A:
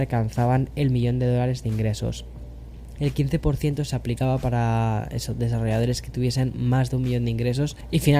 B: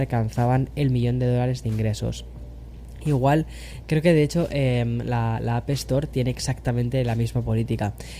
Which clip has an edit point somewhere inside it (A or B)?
A